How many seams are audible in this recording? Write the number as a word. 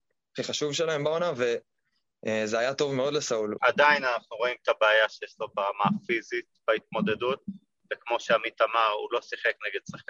one